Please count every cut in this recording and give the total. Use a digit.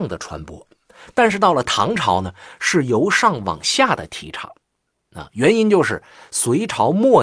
0